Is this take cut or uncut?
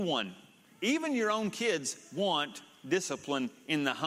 uncut